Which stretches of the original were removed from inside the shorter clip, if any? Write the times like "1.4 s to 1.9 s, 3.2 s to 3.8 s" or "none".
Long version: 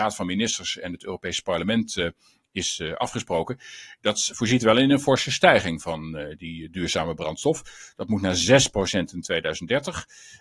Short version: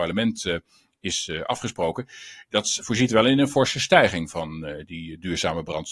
none